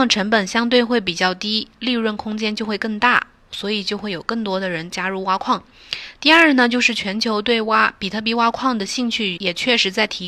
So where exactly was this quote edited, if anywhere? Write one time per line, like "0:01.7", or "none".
0:09.4